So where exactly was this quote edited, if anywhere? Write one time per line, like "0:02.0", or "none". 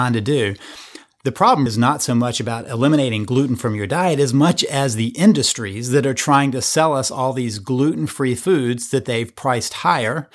0:01.7